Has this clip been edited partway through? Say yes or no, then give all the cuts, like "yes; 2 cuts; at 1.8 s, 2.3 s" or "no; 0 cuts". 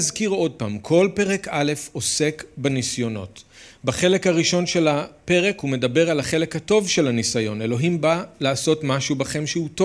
no; 0 cuts